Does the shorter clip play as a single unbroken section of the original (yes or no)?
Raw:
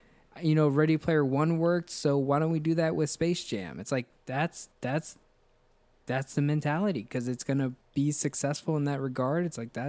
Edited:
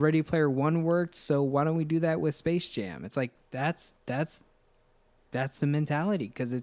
yes